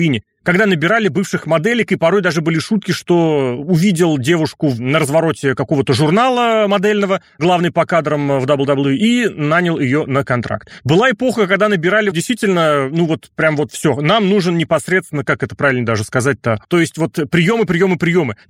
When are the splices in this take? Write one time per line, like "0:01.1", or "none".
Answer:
0:12.1
0:16.6